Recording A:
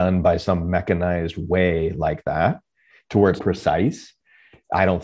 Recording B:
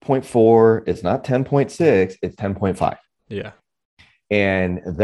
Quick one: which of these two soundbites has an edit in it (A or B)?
A